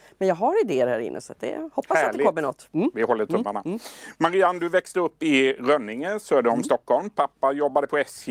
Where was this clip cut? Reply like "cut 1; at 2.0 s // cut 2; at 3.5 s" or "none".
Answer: none